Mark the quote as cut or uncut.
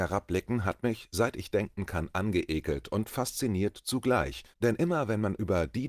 cut